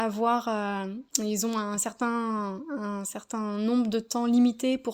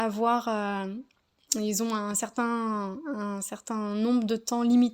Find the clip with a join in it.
first; 1 cut; at 1.1 s

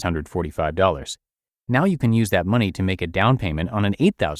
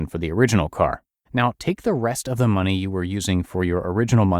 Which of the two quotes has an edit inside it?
second; 1 cut; at 1.3 s

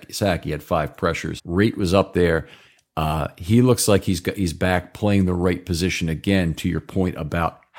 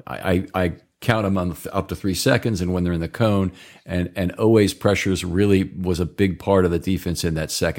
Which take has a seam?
first; 1 cut; at 1.4 s

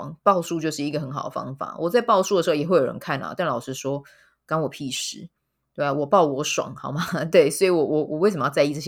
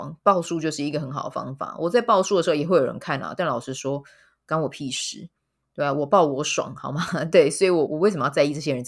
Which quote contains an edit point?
second; 1 cut; at 7.9 s

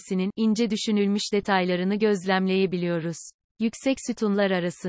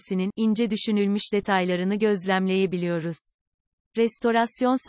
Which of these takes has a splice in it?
first; 1 cut; at 3.4 s

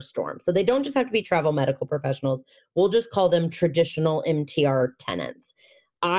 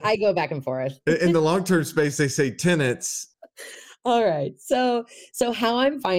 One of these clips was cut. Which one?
second; 1 cut; at 3.3 s

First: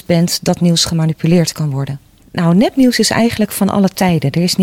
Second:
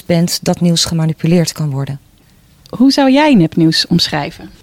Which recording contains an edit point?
first; 1 cut; at 2.2 s

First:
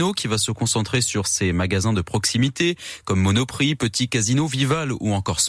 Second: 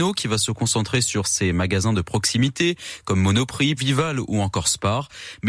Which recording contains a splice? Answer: second; 1 cut; at 3.8 s

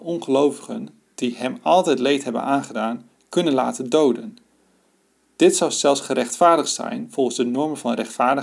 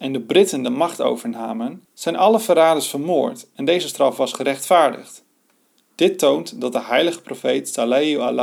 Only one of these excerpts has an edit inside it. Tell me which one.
second; 2 cuts; at 1.8 s, 5.9 s

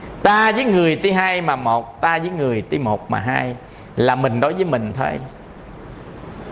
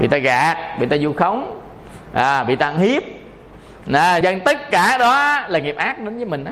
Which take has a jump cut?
second; 1 cut; at 4.2 s

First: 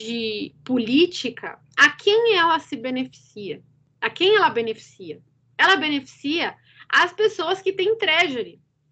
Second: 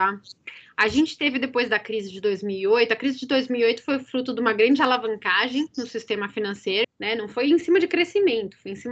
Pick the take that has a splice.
second; 1 cut; at 6.8 s

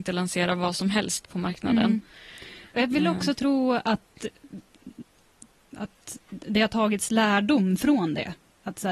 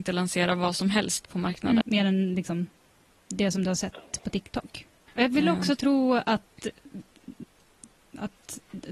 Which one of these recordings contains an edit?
second; 2 cuts; at 1.8 s, 5.1 s

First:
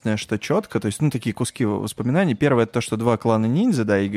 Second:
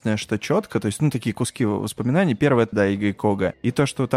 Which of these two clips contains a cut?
second; 1 cut; at 2.7 s

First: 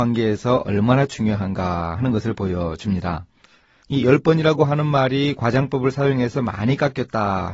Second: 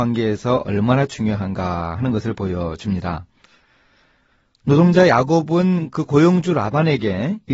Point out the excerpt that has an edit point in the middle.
first; 1 cut; at 3.8 s

